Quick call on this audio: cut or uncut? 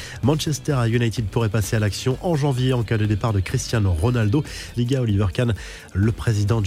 cut